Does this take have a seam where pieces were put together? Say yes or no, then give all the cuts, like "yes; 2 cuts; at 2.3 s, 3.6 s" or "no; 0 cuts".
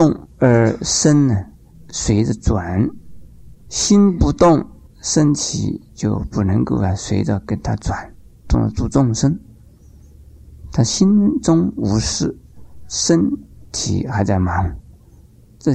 yes; 1 cut; at 8.4 s